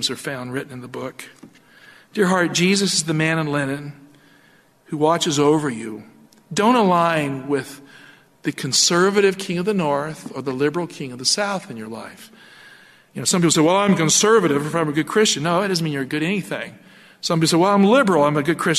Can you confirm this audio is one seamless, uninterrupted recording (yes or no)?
yes